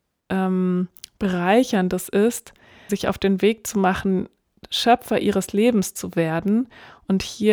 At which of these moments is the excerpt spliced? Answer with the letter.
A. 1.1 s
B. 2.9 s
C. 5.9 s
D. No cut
B